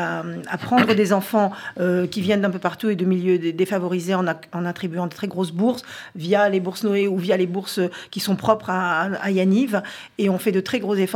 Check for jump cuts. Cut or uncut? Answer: uncut